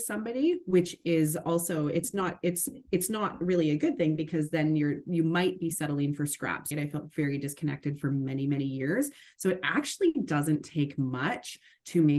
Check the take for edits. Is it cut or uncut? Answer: cut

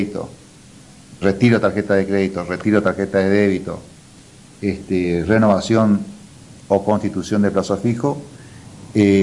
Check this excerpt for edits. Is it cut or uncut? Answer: cut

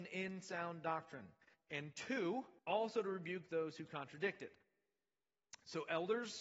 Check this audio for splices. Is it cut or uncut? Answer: cut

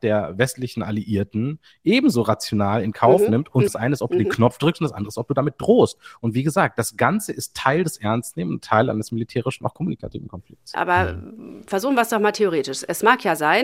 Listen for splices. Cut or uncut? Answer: cut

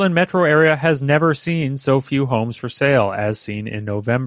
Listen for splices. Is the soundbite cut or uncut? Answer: uncut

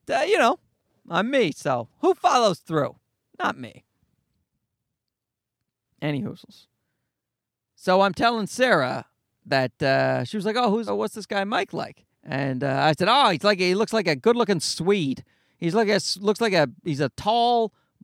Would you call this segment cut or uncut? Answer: cut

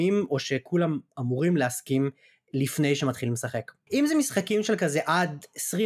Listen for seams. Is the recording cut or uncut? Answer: cut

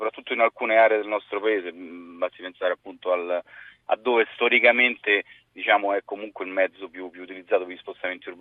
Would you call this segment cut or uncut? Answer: uncut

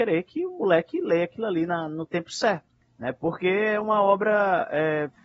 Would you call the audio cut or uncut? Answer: uncut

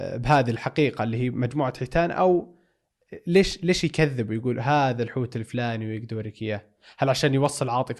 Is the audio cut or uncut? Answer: uncut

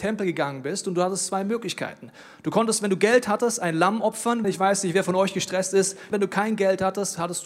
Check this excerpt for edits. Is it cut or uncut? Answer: cut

